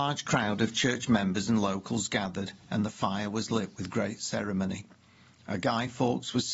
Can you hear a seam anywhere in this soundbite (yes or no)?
no